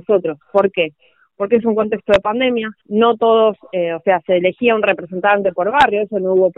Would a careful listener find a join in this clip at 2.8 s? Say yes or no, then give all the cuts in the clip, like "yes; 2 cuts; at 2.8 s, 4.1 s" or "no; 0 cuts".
yes; 1 cut; at 2.8 s